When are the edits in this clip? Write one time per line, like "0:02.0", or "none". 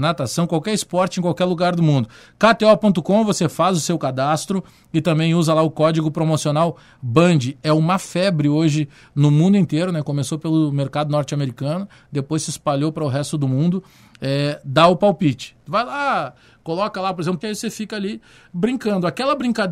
0:17.4